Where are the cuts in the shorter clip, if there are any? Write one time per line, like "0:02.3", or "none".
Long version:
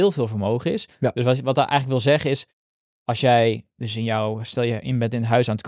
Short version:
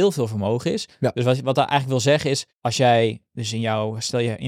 0:02.5